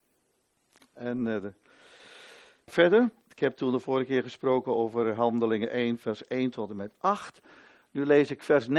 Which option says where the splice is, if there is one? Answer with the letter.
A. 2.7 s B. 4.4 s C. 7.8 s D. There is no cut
A